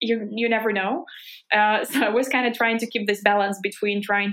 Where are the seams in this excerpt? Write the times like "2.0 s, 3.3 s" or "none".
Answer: none